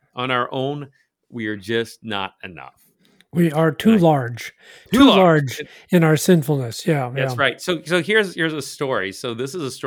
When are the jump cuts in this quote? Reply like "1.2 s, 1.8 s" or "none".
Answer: none